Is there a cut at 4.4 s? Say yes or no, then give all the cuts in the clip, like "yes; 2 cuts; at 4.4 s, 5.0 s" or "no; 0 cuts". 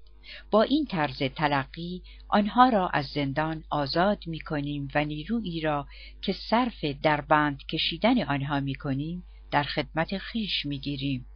no; 0 cuts